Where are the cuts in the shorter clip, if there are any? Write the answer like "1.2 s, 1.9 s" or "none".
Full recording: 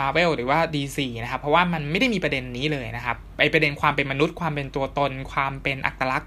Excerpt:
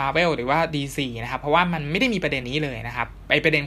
2.4 s